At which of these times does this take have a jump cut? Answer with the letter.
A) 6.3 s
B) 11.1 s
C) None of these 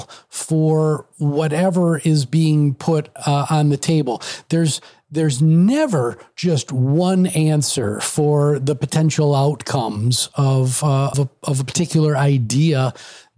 B